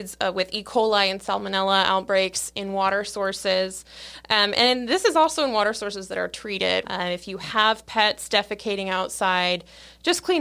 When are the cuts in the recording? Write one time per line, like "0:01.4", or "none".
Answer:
0:06.8